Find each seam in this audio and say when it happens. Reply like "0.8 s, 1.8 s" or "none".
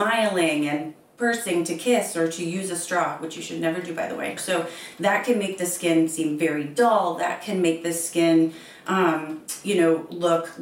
4.4 s